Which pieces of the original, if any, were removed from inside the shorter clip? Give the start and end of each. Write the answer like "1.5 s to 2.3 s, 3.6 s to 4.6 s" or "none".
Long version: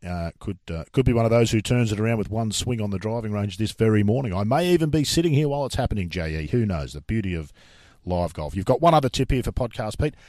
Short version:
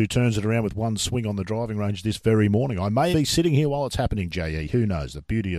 4.7 s to 4.9 s

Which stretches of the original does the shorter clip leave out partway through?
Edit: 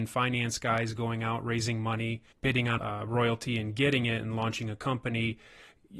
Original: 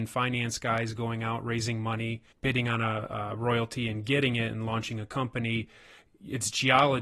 2.8 s to 3.1 s

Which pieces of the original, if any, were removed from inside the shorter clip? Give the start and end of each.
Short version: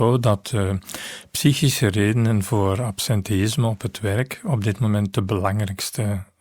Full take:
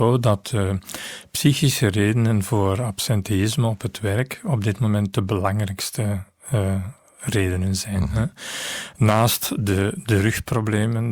none

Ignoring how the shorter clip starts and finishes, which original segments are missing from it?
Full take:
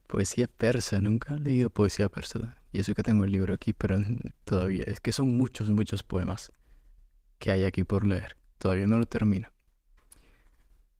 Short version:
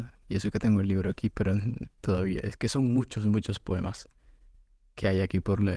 none

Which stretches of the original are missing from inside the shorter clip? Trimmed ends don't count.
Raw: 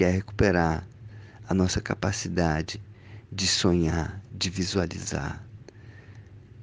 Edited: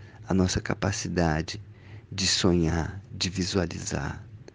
none

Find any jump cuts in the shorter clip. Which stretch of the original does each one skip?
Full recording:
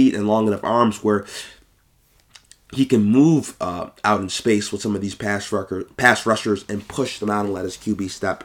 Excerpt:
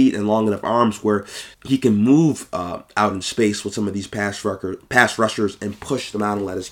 1.5 s to 2.6 s

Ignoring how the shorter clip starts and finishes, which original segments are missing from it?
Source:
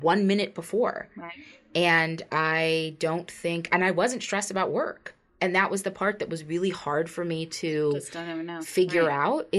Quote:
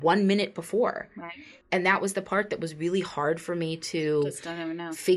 1.6 s to 5.3 s

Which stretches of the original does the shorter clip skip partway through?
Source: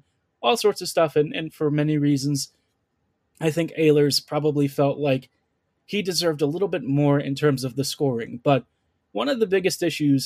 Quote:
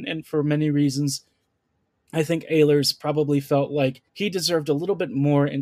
5.4 s to 5.8 s

